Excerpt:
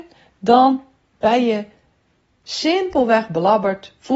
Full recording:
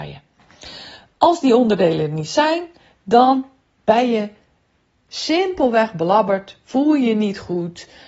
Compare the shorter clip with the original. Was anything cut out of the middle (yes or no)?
no